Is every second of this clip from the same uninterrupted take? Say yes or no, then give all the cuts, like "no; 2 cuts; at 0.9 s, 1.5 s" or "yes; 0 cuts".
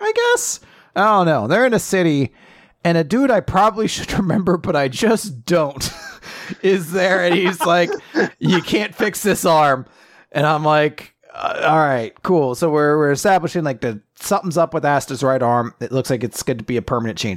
yes; 0 cuts